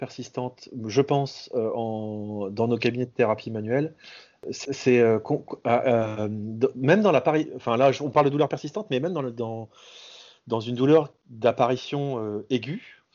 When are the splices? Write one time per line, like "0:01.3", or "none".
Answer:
none